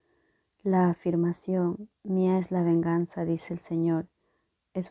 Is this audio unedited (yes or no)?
yes